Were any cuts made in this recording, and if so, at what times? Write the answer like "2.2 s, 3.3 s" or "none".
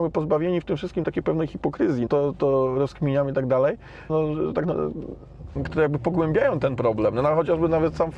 2.1 s, 4.1 s, 5.6 s